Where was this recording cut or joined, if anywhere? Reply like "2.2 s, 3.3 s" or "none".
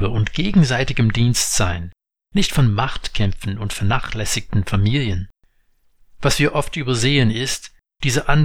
none